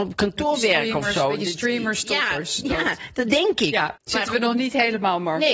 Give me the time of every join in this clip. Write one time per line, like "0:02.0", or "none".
0:04.0